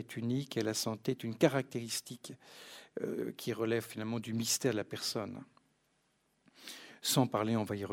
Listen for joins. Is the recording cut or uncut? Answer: uncut